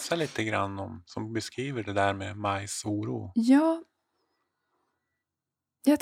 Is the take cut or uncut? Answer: uncut